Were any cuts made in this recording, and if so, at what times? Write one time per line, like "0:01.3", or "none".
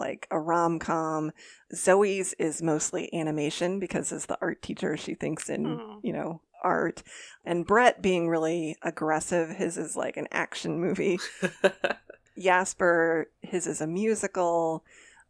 none